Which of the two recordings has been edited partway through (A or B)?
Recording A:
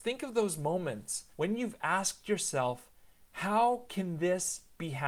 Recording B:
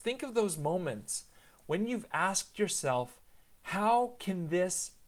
A